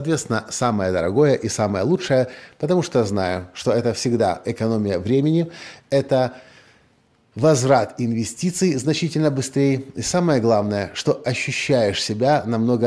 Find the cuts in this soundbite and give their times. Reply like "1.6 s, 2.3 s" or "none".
none